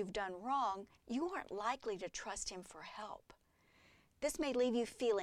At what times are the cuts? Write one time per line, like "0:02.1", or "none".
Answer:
0:01.0